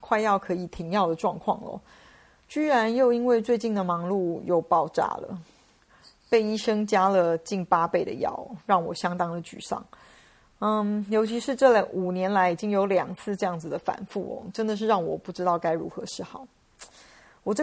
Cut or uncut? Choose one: uncut